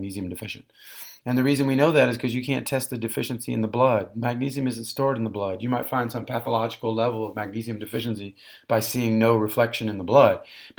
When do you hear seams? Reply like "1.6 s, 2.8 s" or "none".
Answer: none